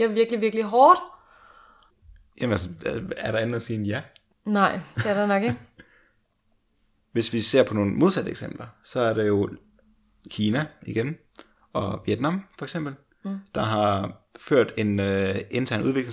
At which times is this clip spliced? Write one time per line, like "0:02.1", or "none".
none